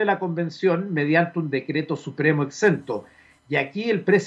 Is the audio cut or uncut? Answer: uncut